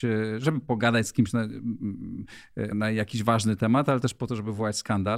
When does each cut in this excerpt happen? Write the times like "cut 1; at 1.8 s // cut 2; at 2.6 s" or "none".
cut 1; at 2.7 s